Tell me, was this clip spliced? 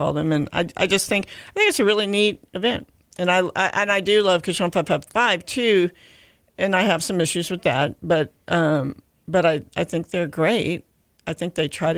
no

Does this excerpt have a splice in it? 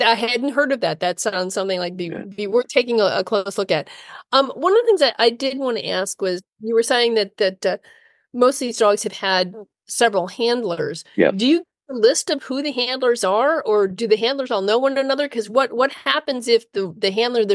no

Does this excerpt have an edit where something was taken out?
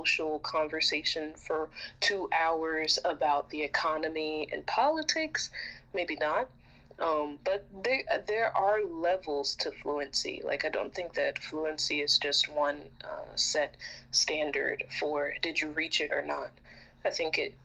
no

